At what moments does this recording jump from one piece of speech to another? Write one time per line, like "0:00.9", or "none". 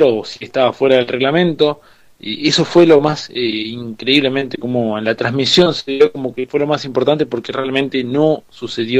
none

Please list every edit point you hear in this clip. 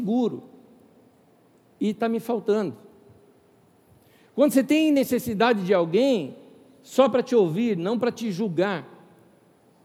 none

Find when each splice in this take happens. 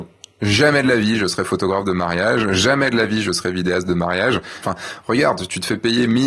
0:04.6

